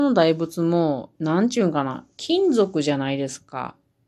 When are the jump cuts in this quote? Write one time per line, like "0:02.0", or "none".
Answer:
0:01.1